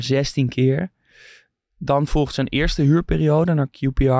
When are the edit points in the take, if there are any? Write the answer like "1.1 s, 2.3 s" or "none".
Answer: none